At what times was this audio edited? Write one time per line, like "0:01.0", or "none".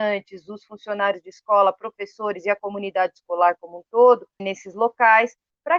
0:04.4